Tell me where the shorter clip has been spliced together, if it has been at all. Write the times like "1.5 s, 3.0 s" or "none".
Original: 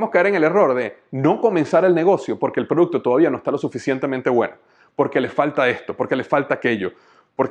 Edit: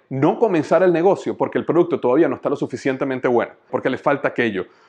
3.7 s